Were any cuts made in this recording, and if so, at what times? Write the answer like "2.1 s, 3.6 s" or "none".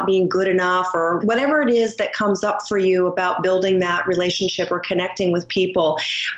1.2 s